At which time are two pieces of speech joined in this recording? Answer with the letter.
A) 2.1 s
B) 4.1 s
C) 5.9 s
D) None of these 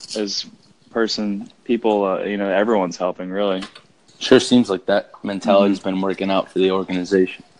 B